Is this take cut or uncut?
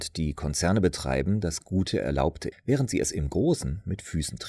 cut